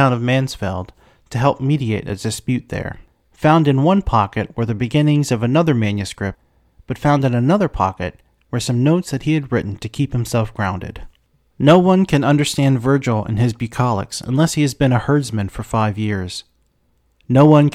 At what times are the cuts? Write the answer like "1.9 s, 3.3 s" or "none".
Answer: none